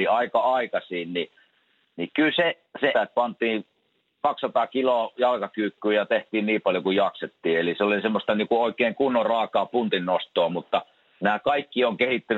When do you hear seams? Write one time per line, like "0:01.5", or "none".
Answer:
0:02.9